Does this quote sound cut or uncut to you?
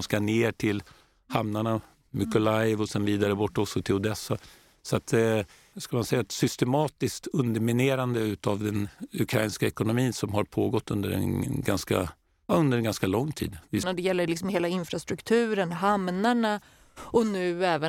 cut